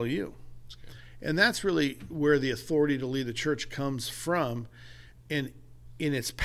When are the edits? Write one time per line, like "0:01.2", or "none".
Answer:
none